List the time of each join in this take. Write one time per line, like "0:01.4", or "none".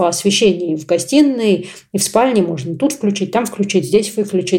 none

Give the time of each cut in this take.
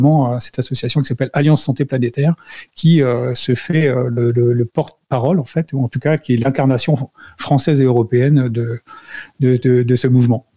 none

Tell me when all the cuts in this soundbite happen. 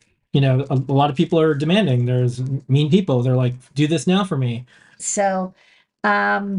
0:05.0

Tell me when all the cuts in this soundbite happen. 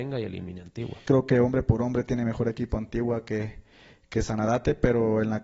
0:01.1

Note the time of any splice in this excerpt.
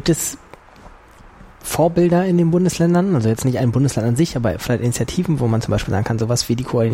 none

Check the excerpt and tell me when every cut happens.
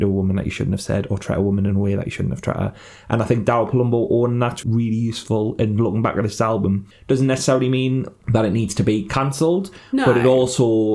0:04.6

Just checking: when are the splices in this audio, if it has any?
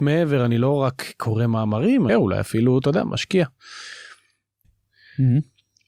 0:02.1
0:04.6

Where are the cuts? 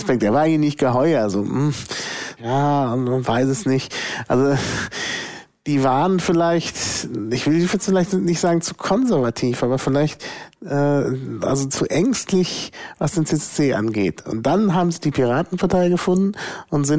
0:02.4

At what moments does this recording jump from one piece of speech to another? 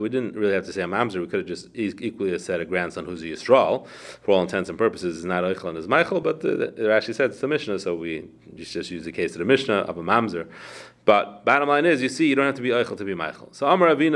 none

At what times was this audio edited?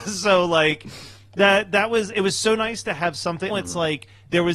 0:03.5

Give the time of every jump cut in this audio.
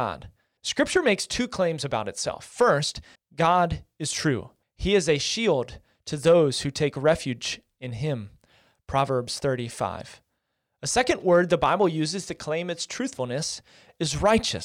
0:03.2
0:04.6

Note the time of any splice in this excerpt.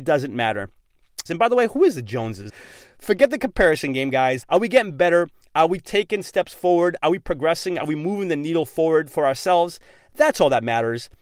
0:01.3
0:02.5
0:04.4

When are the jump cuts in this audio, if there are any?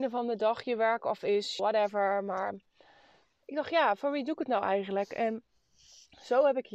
0:01.6

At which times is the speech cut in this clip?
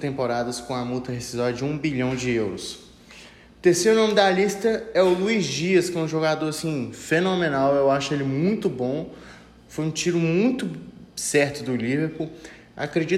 none

